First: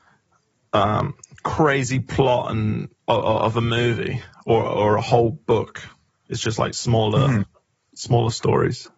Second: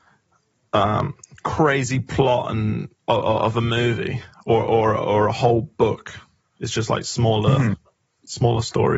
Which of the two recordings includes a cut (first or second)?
first